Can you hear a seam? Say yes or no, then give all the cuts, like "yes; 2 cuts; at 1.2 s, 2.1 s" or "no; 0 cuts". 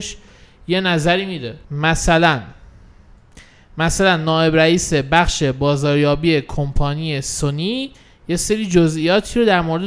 yes; 1 cut; at 1.6 s